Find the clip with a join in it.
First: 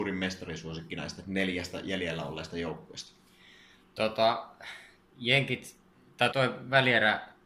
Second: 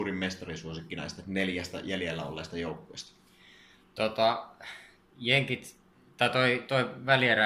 first; 1 cut; at 6.3 s

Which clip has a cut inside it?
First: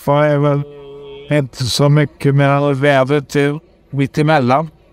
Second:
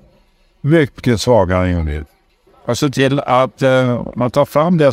second; 1 cut; at 2.5 s

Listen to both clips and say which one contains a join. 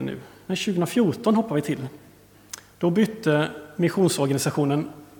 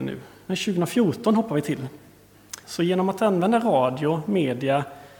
second; 1 cut; at 2.6 s

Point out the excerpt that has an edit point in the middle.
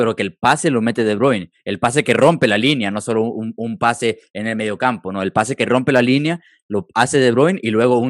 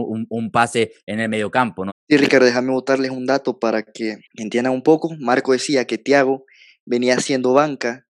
second; 2 cuts; at 1.9 s, 4.2 s

